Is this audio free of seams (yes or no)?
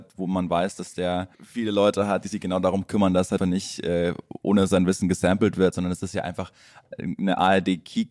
no